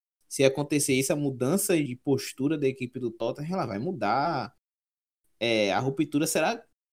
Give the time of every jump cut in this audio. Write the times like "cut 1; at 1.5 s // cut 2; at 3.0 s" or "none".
cut 1; at 1.9 s